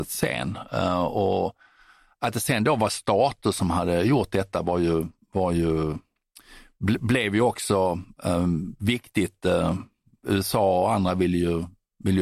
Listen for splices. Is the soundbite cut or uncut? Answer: uncut